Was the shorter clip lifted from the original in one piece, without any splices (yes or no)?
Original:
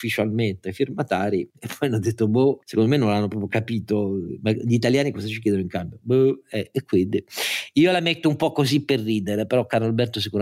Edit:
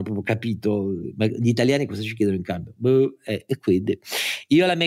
yes